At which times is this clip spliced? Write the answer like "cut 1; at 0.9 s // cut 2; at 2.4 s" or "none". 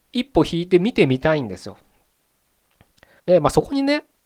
cut 1; at 3.2 s